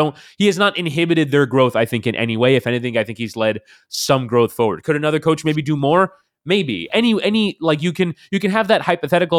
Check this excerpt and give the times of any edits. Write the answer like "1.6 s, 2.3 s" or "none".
none